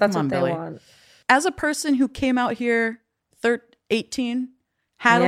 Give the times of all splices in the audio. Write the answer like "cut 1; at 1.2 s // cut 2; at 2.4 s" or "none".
none